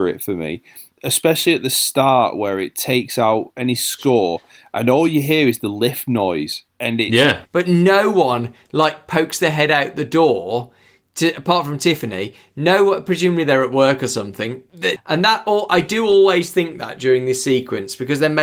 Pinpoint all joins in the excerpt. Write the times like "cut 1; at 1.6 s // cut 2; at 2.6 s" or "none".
cut 1; at 7.5 s // cut 2; at 15.0 s